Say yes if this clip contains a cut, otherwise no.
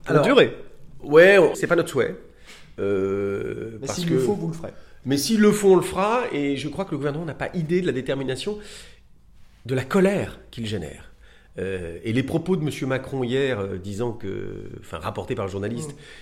yes